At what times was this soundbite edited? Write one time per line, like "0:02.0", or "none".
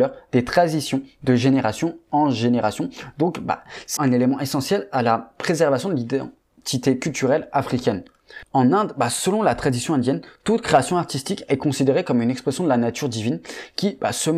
0:04.0